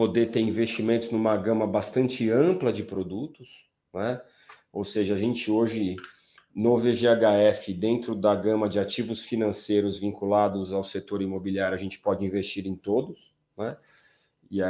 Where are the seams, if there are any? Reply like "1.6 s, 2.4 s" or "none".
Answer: none